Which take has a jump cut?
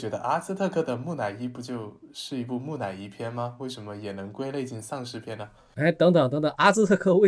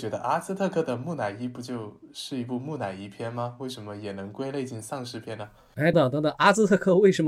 second; 1 cut; at 5.9 s

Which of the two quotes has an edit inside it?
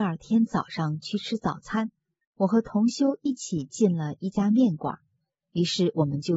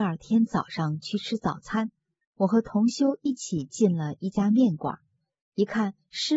first; 1 cut; at 5.4 s

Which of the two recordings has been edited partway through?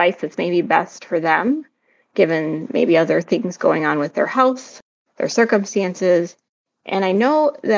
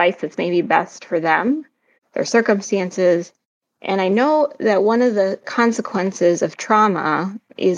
second; 1 cut; at 2.0 s

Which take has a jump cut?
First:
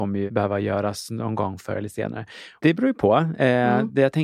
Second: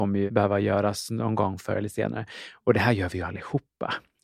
first; 1 cut; at 2.6 s

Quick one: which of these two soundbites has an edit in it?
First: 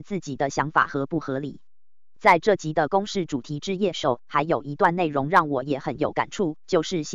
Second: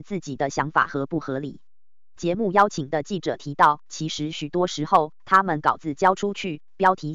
second; 1 cut; at 2.2 s

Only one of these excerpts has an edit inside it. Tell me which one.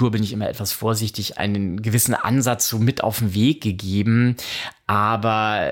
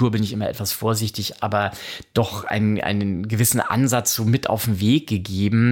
first; 1 cut; at 1.4 s

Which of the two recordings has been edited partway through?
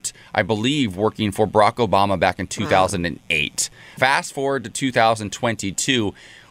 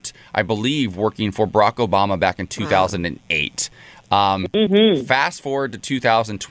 first; 1 cut; at 4.0 s

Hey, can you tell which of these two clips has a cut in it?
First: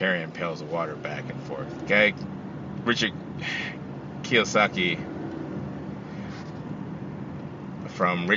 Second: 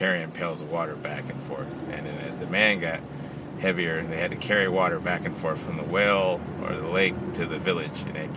first; 1 cut; at 1.9 s

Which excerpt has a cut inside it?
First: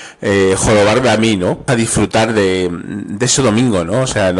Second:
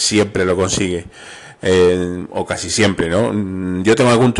first; 1 cut; at 1.7 s

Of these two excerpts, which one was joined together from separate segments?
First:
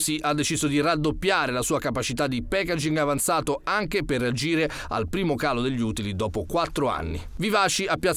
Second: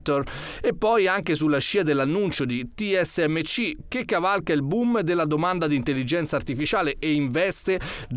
second; 1 cut; at 3.9 s

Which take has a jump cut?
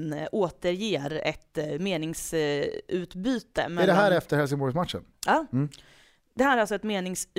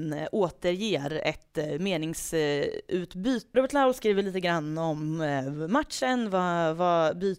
second; 1 cut; at 3.5 s

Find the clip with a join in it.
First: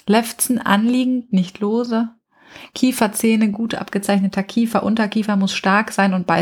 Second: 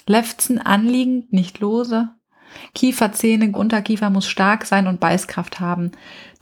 second; 1 cut; at 3.5 s

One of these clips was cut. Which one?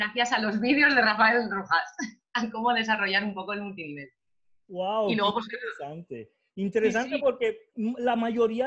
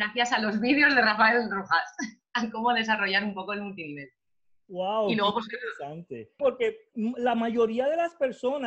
second; 1 cut; at 6.4 s

